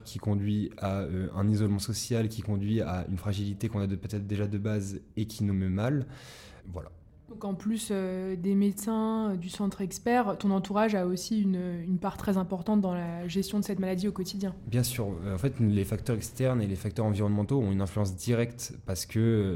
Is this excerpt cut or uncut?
cut